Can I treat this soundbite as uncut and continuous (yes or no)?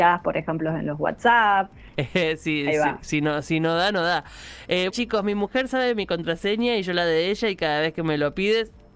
no